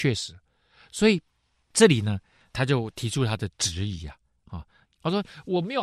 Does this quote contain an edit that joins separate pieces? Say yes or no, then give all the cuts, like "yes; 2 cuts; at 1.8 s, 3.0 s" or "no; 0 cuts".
yes; 1 cut; at 4.8 s